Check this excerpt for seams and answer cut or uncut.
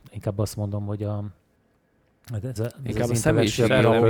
cut